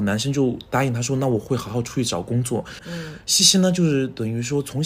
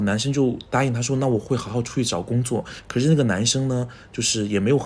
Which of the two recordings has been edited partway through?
first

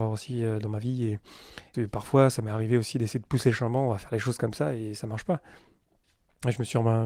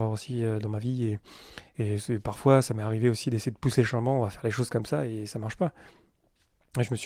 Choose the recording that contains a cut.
first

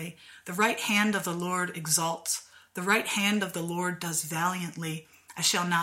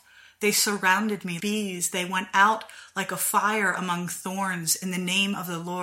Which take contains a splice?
second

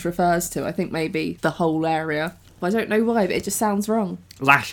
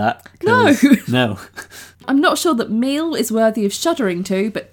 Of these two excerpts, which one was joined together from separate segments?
first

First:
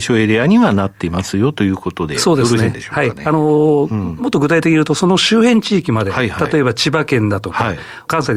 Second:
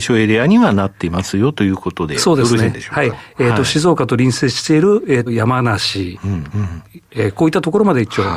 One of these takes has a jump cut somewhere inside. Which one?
second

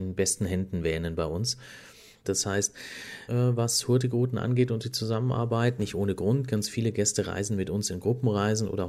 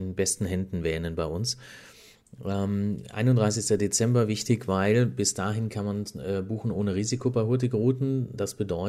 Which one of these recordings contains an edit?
first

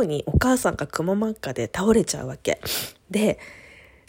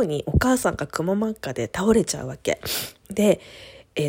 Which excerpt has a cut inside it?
second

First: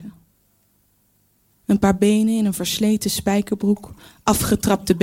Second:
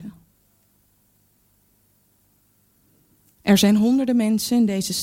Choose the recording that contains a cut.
first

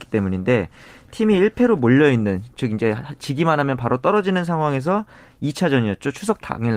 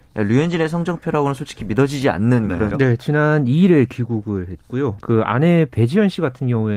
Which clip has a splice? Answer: second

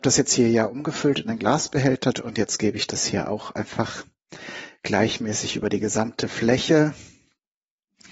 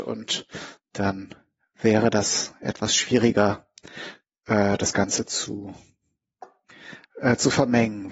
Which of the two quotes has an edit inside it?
first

